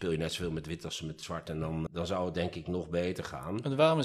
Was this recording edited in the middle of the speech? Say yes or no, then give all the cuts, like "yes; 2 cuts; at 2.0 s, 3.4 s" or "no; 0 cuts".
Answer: yes; 1 cut; at 1.9 s